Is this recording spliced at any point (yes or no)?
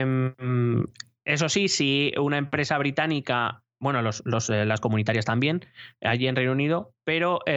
no